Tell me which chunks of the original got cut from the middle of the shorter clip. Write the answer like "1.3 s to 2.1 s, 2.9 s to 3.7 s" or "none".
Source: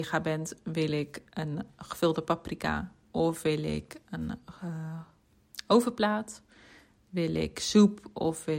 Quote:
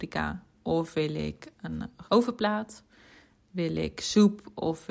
4.5 s to 5.6 s